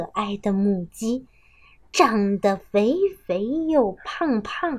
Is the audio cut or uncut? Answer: uncut